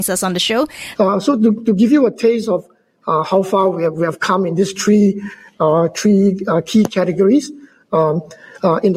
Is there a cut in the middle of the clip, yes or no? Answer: yes